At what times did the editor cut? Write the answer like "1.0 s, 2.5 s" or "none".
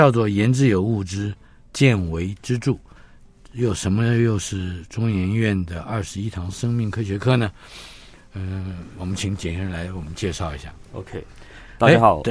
none